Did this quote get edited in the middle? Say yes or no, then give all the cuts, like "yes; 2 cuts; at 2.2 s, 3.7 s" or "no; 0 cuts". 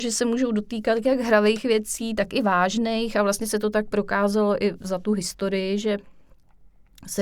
no; 0 cuts